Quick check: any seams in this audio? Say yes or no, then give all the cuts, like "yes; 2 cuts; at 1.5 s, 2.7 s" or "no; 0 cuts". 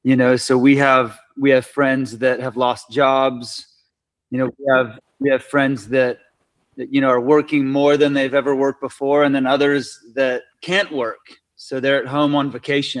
no; 0 cuts